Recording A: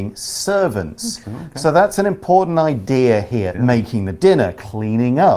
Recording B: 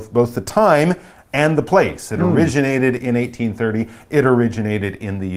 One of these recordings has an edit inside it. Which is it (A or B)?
A